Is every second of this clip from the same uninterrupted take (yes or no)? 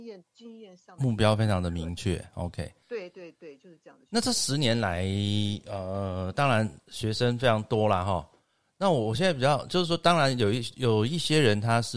no